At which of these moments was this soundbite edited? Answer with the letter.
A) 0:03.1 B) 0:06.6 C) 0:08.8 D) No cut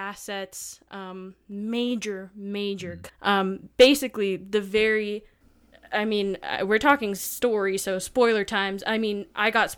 A